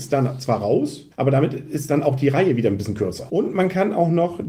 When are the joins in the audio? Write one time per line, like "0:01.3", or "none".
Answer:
0:01.1
0:03.3